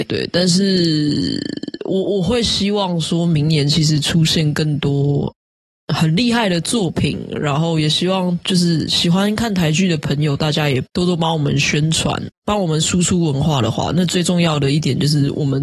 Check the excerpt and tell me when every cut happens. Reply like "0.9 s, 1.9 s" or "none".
12.3 s